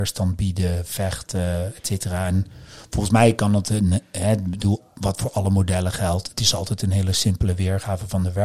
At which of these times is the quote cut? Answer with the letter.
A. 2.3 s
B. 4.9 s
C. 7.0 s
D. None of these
D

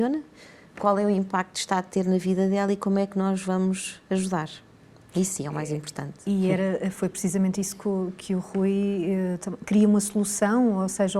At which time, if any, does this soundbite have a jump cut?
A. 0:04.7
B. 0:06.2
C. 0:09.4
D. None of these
D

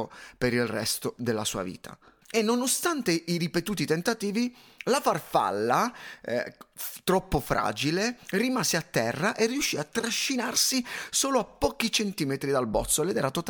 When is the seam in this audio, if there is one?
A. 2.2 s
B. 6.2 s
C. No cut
A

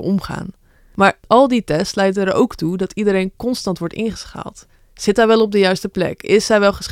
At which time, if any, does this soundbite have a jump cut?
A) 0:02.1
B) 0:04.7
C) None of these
C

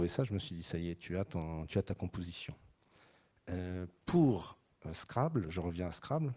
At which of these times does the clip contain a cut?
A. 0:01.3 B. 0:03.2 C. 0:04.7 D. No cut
D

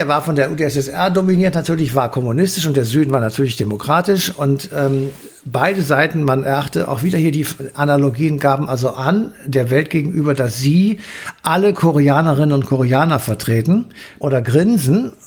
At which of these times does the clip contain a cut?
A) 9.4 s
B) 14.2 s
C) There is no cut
B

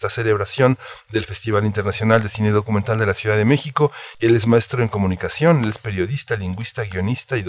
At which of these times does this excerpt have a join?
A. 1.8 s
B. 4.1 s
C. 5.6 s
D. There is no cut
B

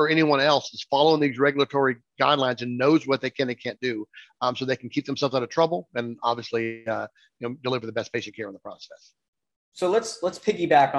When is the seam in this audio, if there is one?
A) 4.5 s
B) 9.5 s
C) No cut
C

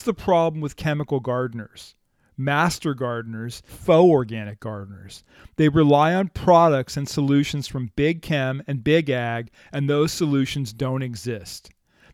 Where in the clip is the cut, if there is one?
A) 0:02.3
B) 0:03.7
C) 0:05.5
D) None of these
B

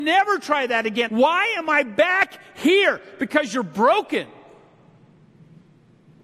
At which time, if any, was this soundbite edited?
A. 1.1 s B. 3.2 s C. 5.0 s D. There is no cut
A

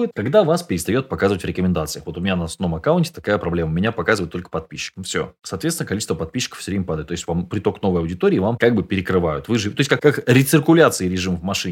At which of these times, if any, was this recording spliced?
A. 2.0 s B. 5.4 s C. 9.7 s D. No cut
D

